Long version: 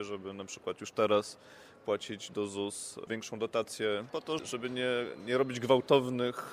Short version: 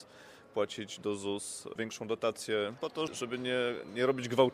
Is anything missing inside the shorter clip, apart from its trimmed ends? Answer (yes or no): no